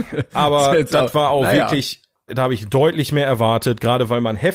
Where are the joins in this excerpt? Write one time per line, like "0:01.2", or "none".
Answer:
0:02.3